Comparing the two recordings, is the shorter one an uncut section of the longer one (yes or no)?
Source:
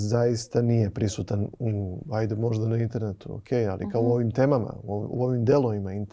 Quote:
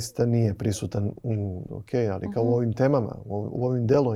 no